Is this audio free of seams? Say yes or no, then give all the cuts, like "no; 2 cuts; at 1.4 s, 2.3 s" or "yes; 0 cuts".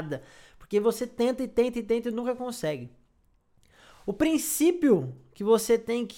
yes; 0 cuts